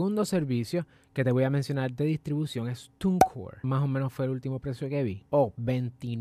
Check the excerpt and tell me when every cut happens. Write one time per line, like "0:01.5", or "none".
0:03.6